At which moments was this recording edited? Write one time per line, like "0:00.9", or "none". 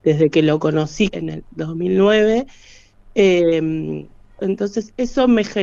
0:01.1
0:04.4